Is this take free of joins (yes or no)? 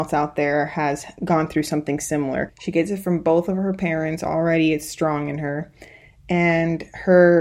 no